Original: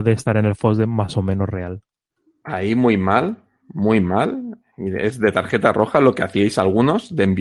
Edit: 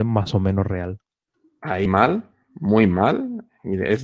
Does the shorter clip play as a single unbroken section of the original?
no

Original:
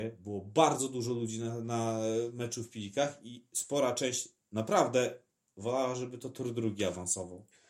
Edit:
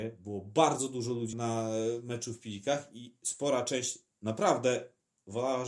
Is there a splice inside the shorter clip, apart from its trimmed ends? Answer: yes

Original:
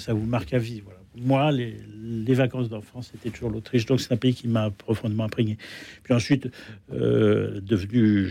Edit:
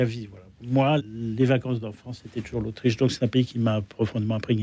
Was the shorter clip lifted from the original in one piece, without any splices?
no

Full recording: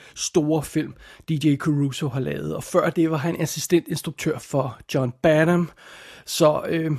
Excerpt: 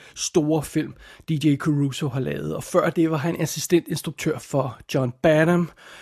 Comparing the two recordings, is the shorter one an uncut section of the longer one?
yes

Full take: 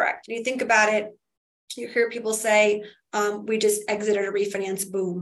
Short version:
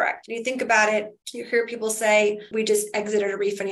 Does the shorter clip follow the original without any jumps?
no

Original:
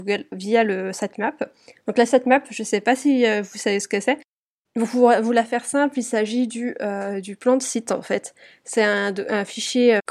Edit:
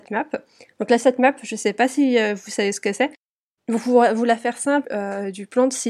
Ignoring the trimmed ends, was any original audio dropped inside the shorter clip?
yes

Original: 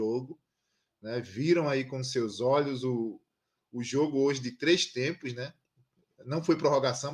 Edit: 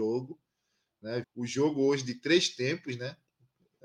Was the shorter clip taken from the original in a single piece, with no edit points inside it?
no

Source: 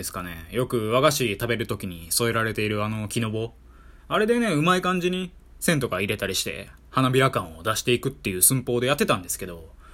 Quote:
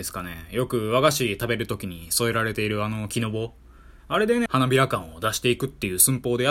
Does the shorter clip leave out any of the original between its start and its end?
yes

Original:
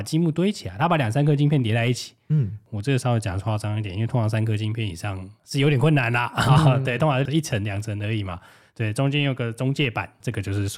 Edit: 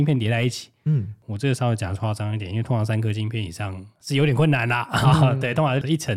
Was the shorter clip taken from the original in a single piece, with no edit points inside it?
yes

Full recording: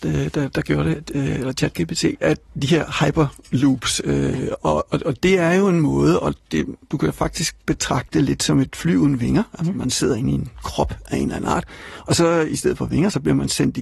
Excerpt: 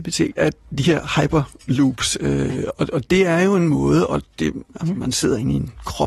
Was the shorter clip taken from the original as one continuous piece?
no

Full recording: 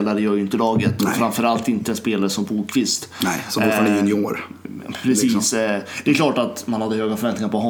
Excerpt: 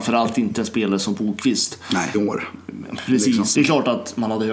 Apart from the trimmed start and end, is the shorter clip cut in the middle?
yes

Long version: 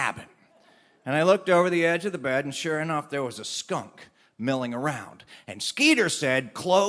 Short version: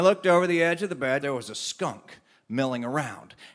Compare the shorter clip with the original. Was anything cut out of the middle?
yes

